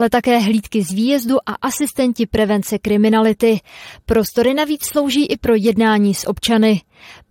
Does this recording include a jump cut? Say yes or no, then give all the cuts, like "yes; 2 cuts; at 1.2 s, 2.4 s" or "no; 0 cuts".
no; 0 cuts